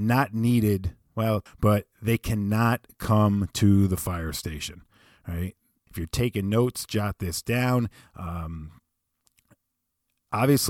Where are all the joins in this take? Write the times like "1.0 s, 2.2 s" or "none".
1.5 s, 5.9 s